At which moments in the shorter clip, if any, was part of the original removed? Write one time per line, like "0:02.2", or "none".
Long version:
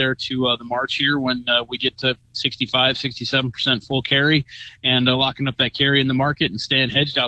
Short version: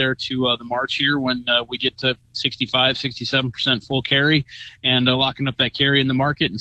none